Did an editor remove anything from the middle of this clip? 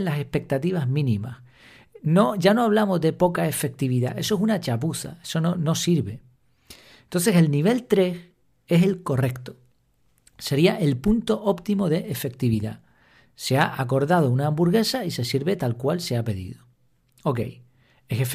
yes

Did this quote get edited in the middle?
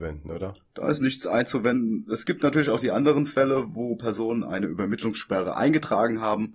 no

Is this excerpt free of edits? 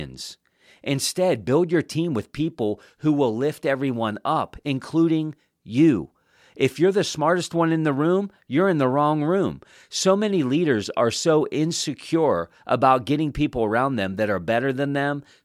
yes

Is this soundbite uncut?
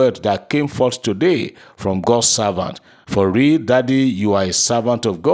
yes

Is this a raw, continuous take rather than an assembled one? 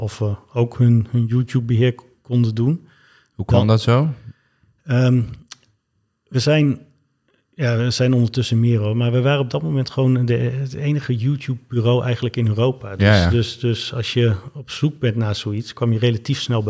yes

